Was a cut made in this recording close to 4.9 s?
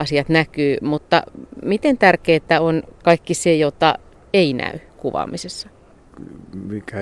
yes; 1 cut; at 4.9 s

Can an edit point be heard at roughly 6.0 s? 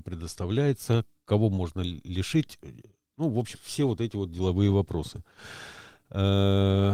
no; 1 cut; at 3.5 s

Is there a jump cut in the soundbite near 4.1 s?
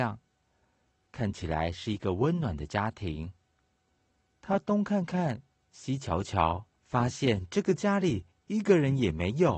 no; 1 cut; at 6.8 s

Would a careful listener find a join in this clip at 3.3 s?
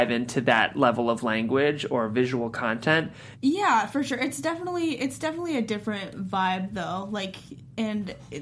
yes; 1 cut; at 3.3 s

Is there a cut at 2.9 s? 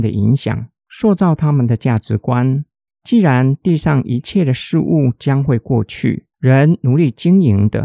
yes; 2 cuts; at 2.9 s, 6.3 s

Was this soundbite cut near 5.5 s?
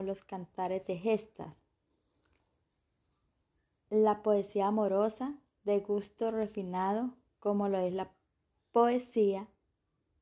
no; 0 cuts

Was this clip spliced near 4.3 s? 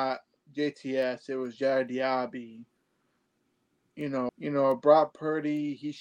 yes; 1 cut; at 4.3 s

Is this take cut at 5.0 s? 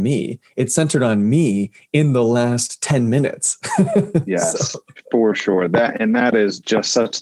no; 0 cuts

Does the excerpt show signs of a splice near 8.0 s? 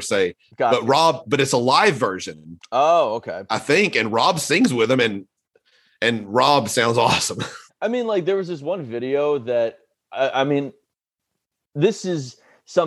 no; 0 cuts

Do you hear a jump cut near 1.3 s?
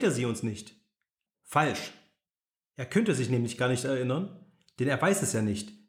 yes; 1 cut; at 1.3 s

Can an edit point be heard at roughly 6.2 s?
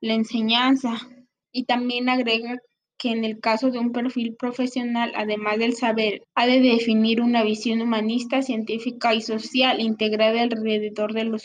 yes; 2 cuts; at 1.4 s, 6.2 s

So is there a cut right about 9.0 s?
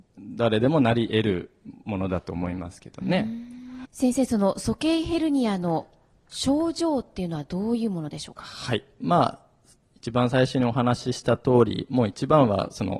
yes; 2 cuts; at 3.8 s, 9.0 s

